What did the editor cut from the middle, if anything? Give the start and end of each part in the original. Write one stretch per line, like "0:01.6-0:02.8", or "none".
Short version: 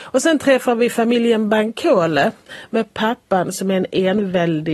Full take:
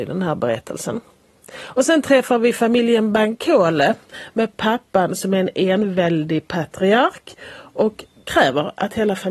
none